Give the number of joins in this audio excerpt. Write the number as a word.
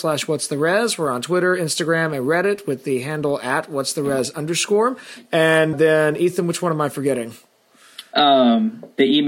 one